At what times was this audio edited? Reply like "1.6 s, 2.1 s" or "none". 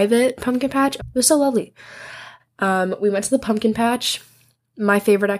1.0 s, 2.4 s